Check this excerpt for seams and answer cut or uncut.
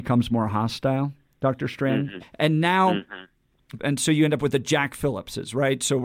cut